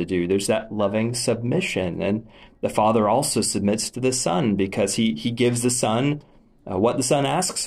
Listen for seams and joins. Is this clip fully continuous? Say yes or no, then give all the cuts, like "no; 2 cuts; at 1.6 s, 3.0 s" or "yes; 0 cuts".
yes; 0 cuts